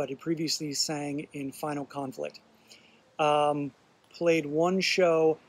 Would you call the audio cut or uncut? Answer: cut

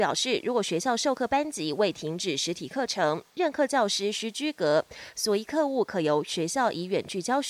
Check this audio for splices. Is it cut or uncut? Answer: uncut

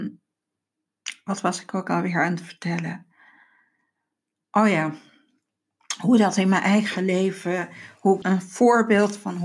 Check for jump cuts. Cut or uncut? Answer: cut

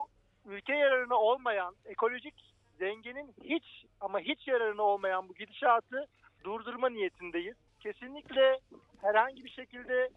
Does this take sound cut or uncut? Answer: cut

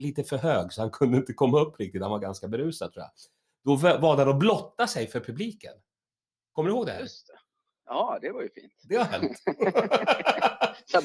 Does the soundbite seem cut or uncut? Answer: uncut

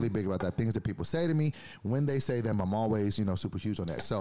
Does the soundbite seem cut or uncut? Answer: uncut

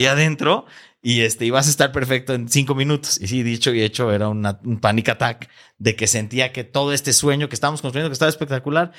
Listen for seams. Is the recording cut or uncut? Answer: uncut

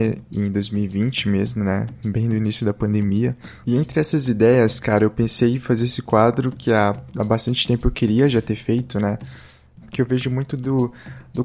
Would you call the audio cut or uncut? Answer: cut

